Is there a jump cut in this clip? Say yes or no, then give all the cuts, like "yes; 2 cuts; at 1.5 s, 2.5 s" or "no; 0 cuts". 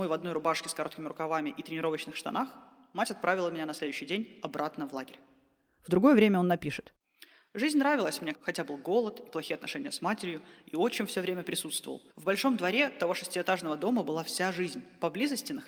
yes; 2 cuts; at 8.3 s, 12.1 s